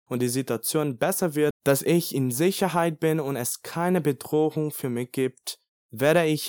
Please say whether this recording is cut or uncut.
cut